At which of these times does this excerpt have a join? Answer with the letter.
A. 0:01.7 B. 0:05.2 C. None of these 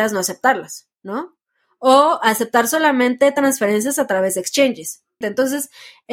B